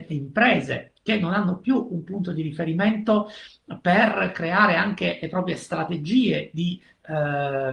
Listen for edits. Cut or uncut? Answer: uncut